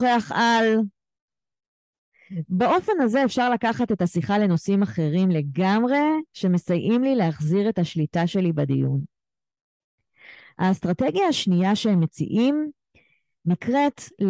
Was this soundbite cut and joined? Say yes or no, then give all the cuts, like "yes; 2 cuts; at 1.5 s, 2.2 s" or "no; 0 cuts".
no; 0 cuts